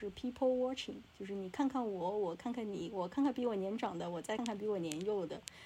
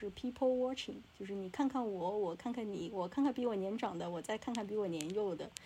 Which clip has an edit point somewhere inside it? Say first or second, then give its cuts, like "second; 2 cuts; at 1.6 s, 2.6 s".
first; 1 cut; at 4.4 s